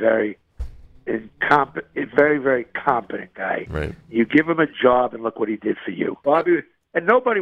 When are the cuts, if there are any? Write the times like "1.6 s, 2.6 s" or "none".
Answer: 6.2 s